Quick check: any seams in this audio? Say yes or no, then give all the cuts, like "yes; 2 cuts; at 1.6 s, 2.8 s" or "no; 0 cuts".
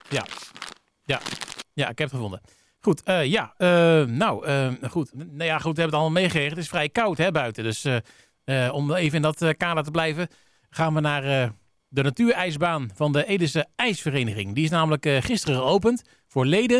yes; 1 cut; at 5.1 s